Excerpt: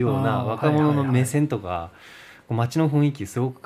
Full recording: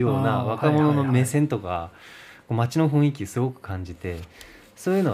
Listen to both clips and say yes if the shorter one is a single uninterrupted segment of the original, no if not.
yes